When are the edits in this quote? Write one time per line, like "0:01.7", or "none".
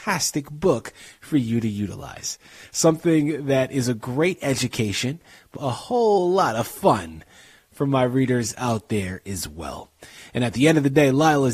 0:05.6